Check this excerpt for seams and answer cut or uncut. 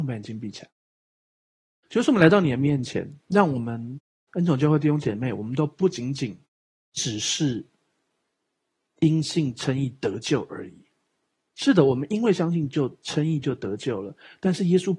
uncut